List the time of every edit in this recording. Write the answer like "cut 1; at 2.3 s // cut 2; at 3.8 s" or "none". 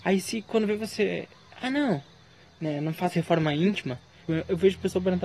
cut 1; at 4.3 s